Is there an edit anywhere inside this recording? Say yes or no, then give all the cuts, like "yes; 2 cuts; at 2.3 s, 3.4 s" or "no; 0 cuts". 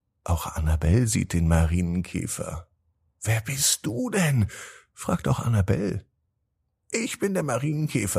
no; 0 cuts